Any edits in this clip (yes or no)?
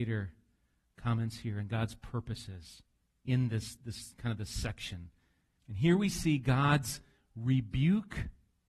yes